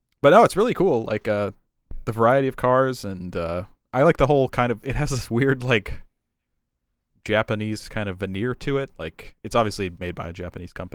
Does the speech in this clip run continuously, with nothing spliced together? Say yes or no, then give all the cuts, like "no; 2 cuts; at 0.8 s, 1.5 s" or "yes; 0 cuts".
yes; 0 cuts